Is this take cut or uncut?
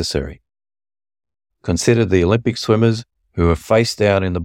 cut